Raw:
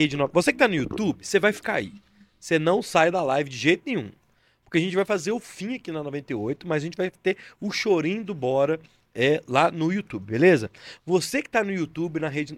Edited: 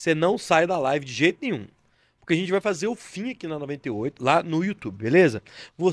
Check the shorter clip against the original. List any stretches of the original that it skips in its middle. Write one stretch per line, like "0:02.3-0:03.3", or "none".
0:06.6-0:09.4